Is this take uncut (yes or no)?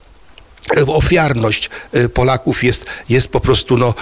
yes